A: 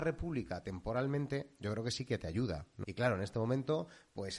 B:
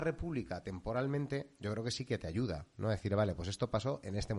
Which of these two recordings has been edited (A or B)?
A